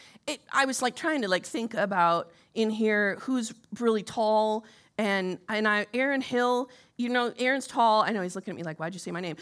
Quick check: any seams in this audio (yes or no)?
no